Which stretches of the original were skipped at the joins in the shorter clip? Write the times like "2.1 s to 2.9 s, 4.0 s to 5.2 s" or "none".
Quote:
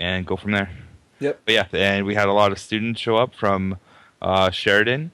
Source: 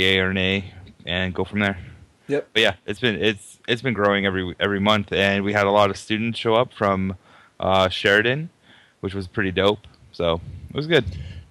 2.8 s to 5.1 s